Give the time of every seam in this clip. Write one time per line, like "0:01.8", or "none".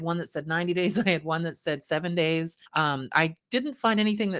0:02.7